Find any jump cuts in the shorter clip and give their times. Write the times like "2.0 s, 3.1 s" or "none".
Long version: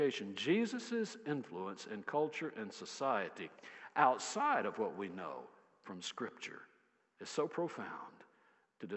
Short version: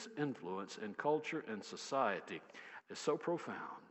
2.8 s